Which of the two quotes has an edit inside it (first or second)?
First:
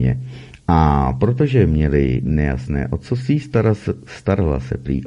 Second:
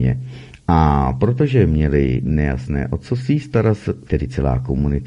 second